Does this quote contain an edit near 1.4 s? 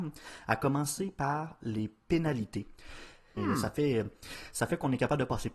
no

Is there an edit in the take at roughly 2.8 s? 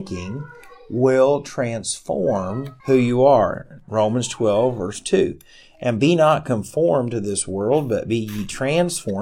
yes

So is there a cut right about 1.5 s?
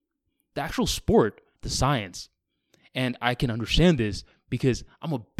yes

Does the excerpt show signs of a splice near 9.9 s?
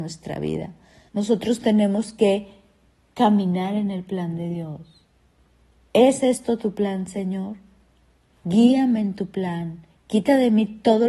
no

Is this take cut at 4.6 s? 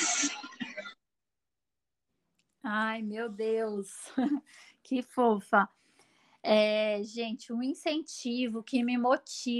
no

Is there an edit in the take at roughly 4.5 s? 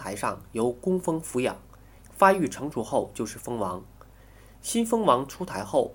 no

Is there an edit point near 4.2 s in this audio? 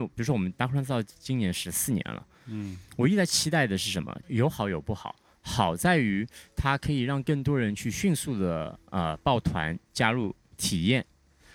yes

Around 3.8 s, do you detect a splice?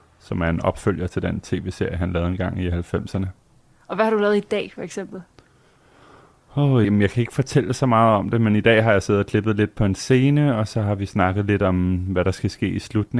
no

